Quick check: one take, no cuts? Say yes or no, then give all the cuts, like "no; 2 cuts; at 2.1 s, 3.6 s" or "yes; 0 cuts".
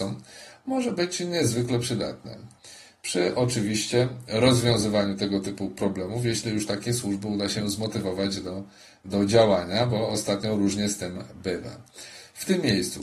yes; 0 cuts